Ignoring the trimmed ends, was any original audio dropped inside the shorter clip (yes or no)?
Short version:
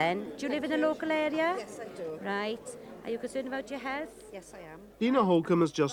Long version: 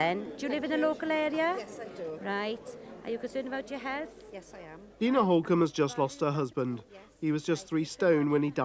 no